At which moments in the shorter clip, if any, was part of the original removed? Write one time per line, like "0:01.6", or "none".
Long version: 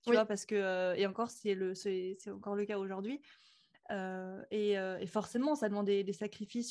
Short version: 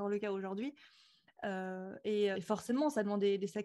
0:02.3